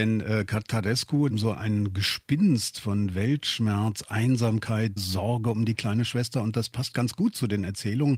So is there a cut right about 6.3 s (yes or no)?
no